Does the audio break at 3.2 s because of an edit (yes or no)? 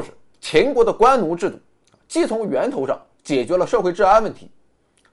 no